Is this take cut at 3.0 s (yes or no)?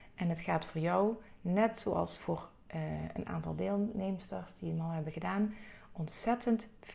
no